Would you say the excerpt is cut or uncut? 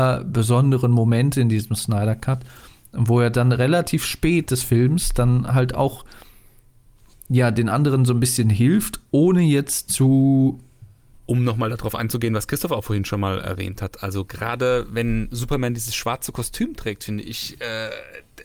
cut